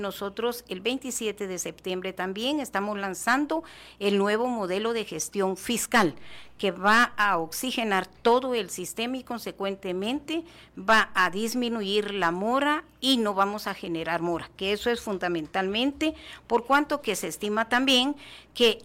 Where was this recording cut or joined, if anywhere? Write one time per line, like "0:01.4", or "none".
none